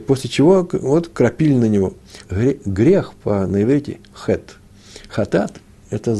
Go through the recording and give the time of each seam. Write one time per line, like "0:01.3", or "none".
0:02.2